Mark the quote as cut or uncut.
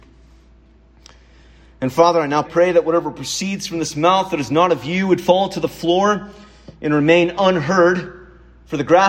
cut